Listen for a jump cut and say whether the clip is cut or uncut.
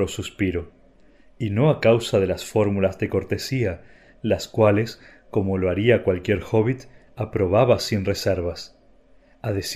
uncut